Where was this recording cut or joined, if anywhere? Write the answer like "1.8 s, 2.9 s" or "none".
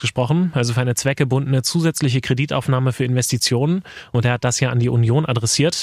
none